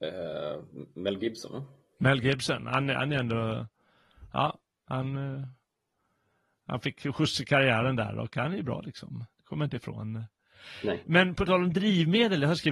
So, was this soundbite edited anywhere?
no; 0 cuts

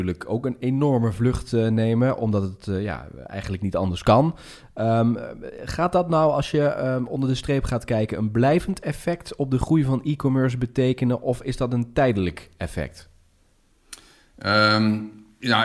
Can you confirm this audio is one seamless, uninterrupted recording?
yes; 0 cuts

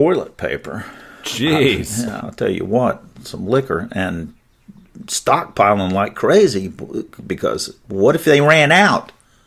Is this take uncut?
no; 1 cut; at 2.2 s

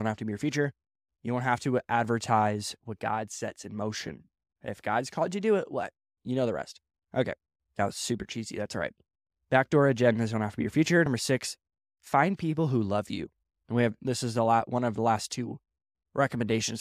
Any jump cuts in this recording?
no; 0 cuts

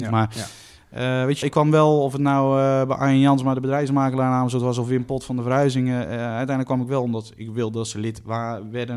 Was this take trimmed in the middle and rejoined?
yes; 1 cut; at 1.4 s

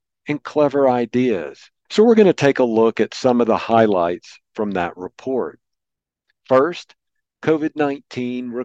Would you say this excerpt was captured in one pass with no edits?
no; 1 cut; at 1.9 s

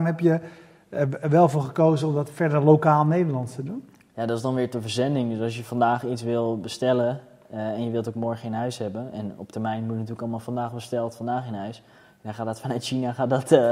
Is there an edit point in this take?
no; 0 cuts

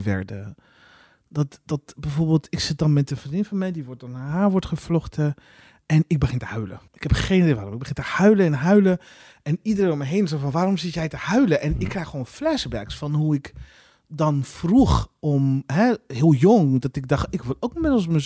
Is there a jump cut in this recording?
yes; 1 cut; at 6.9 s

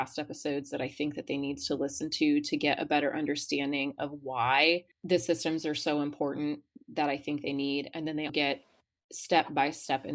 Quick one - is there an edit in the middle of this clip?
yes; 2 cuts; at 4.9 s, 8.3 s

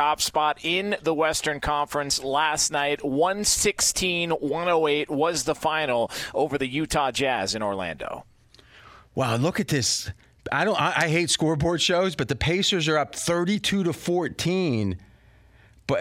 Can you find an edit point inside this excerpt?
no; 0 cuts

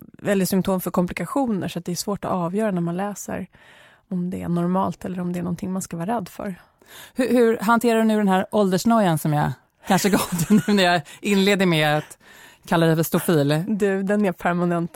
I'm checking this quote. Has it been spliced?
no; 0 cuts

